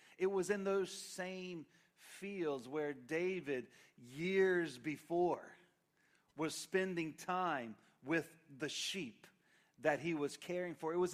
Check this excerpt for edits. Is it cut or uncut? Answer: uncut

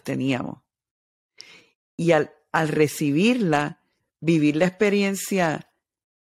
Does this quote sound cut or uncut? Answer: uncut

